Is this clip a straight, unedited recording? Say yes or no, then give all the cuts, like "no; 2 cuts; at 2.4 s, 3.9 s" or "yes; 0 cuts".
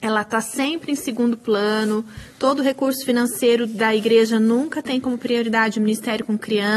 yes; 0 cuts